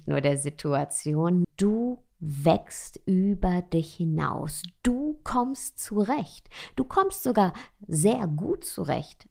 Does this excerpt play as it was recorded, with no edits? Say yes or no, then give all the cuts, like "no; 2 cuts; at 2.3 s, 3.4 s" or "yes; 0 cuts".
no; 1 cut; at 1.4 s